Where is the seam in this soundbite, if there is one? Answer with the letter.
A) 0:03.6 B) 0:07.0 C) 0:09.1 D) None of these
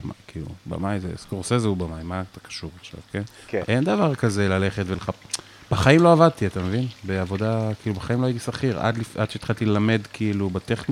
A